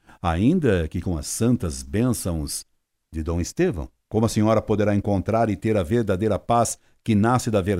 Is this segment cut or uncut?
cut